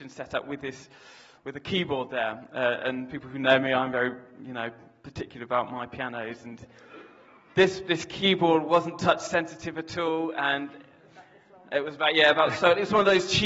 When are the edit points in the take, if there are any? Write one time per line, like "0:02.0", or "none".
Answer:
none